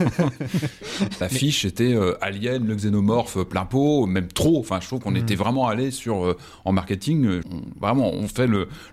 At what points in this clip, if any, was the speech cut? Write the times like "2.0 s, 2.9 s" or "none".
1.2 s, 7.4 s